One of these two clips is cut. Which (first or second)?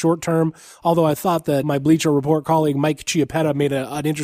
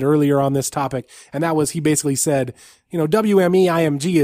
first